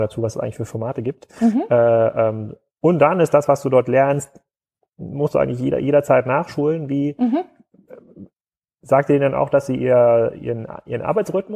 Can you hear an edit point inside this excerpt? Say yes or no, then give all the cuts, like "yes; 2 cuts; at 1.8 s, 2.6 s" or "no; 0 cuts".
no; 0 cuts